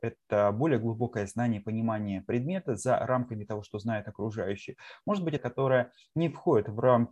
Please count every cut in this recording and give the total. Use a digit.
1